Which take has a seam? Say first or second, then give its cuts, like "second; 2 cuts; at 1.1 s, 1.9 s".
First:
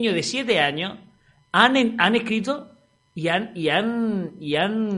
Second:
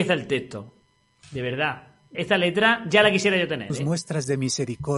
second; 1 cut; at 2.1 s